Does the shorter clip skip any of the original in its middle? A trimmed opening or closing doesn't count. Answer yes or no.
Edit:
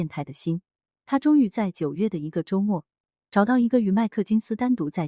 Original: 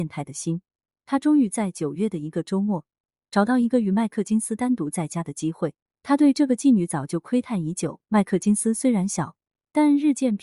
no